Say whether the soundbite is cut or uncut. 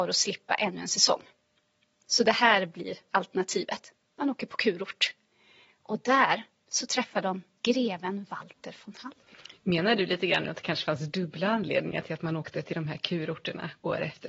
uncut